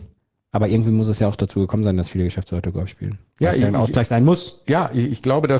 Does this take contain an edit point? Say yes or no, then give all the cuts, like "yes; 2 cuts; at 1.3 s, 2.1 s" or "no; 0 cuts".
no; 0 cuts